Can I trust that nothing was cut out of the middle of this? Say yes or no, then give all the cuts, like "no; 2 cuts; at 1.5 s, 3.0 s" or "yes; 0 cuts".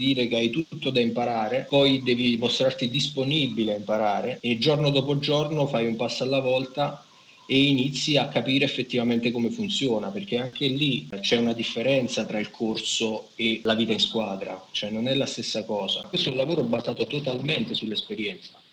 no; 1 cut; at 16.0 s